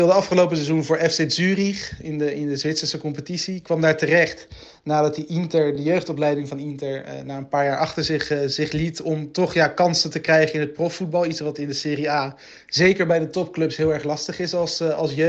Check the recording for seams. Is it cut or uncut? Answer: uncut